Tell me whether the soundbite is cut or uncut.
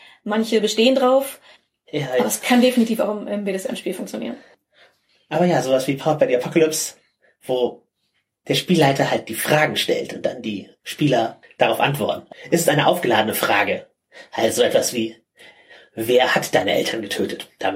uncut